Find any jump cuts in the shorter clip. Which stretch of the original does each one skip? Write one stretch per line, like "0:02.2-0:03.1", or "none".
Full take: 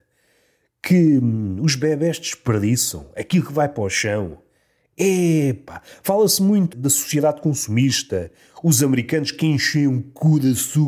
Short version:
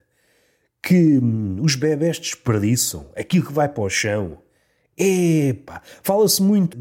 none

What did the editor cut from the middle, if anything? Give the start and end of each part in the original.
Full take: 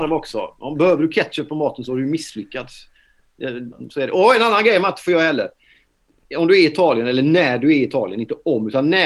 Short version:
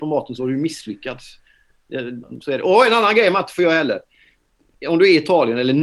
none

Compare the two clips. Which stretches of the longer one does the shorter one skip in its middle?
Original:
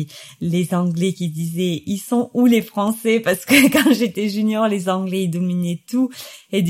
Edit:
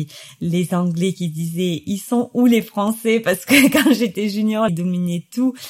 0:04.7-0:05.2

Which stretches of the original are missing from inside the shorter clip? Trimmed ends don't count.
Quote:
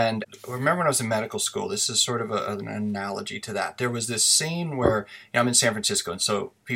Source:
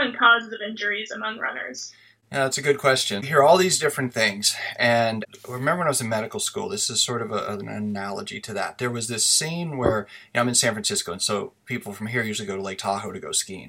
none

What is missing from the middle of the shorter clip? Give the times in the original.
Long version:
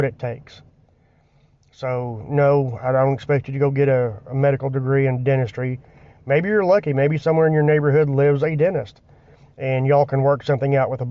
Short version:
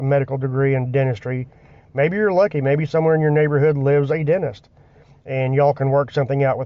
none

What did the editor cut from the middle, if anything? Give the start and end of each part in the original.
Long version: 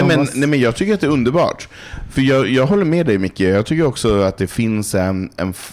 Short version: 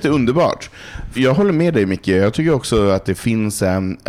0:02.1-0:02.5

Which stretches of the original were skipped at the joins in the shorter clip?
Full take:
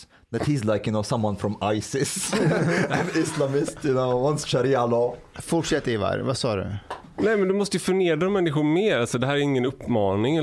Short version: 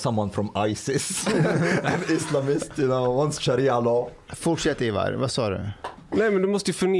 none

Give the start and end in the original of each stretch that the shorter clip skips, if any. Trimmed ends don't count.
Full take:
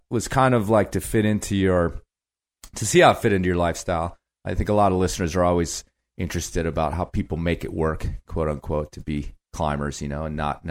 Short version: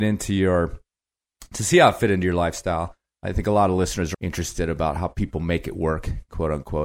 0:05.4-0:06.1

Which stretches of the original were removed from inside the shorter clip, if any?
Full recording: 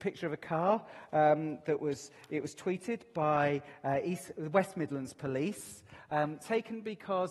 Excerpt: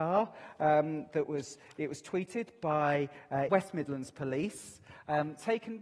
0:04.0-0:04.5

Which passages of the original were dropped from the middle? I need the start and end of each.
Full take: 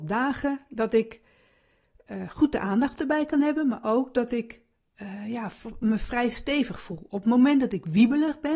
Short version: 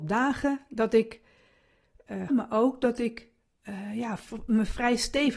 0:02.3-0:03.6

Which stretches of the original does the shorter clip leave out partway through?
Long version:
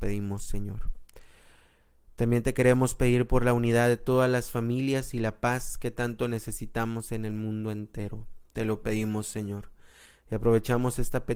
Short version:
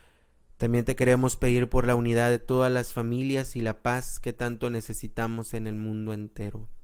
none

